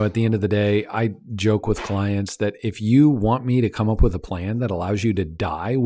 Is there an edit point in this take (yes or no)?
no